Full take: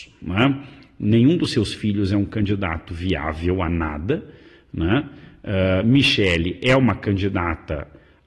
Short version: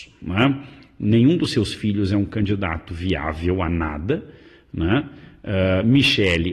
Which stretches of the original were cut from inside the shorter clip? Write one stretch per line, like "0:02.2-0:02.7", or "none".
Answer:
none